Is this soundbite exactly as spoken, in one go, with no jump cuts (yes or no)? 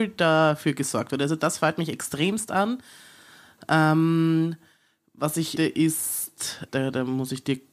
no